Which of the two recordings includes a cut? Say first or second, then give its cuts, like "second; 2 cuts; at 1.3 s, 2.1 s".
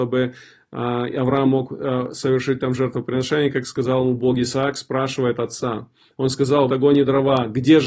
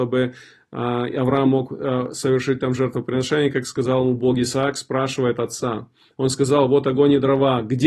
first; 1 cut; at 6.7 s